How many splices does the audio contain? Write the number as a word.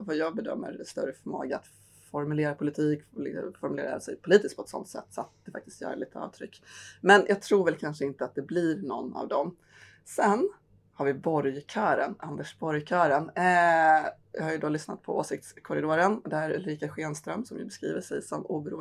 zero